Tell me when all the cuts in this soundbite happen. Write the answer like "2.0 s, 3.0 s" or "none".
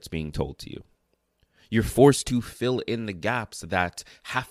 none